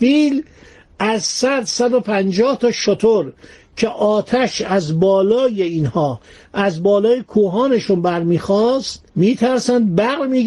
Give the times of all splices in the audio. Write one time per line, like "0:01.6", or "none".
0:09.1